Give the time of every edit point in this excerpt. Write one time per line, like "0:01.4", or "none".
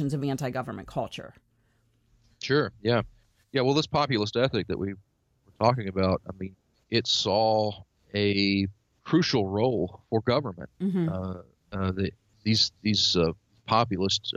0:06.7

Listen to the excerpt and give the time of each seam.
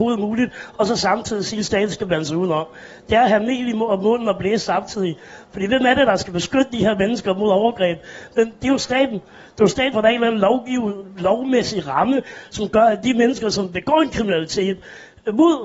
0:09.9

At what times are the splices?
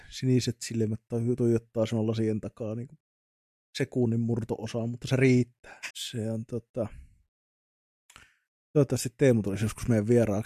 0:05.9

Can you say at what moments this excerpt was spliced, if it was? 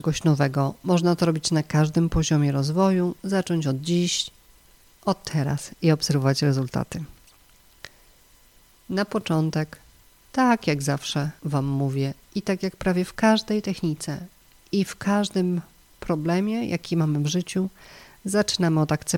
none

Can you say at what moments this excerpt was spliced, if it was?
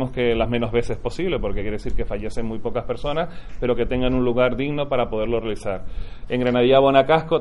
0:06.3

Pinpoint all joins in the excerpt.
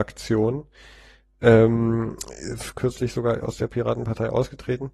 none

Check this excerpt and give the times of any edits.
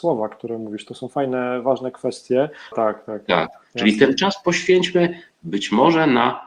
0:02.7

